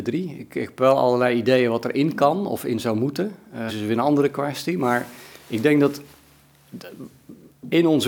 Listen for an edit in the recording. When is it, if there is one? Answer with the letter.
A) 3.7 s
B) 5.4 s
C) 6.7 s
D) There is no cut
A